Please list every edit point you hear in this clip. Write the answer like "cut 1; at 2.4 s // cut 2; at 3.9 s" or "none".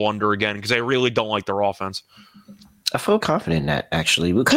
cut 1; at 3.2 s